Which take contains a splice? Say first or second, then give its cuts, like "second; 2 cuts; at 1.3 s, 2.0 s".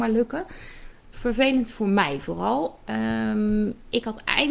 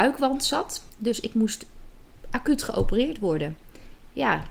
first; 1 cut; at 1.1 s